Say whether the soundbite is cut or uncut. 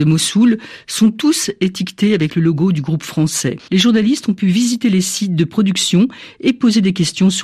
cut